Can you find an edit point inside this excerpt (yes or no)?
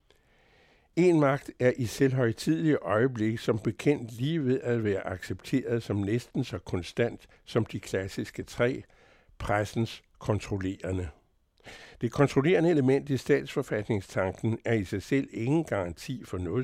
no